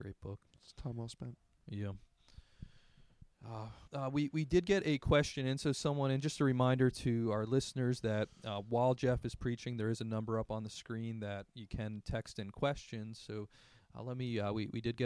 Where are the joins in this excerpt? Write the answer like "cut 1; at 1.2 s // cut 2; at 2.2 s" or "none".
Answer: cut 1; at 3.9 s